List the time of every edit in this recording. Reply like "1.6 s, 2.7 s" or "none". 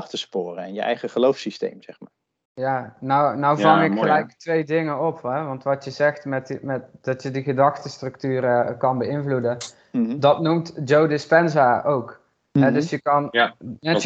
none